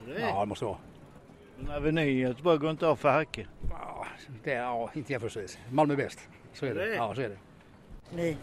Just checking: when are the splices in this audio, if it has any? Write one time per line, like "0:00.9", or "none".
none

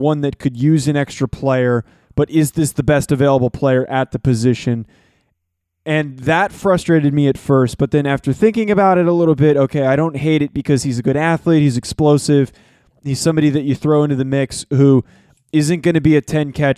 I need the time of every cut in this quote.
none

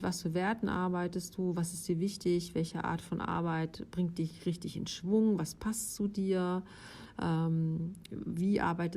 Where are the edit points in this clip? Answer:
none

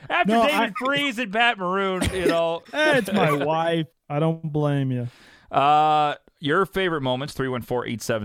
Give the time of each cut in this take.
0:02.6
0:03.9

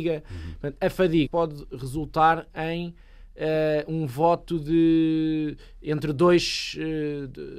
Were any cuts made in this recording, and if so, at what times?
0:01.3

